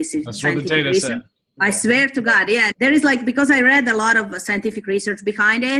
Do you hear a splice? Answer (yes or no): yes